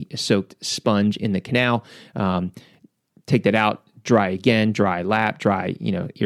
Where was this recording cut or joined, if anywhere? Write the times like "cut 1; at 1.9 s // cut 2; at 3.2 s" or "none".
none